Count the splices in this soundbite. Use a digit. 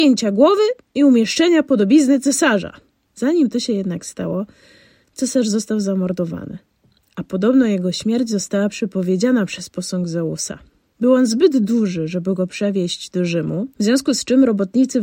0